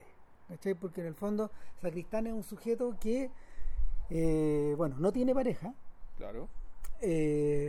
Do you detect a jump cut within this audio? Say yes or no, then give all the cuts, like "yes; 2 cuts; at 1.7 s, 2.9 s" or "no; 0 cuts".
no; 0 cuts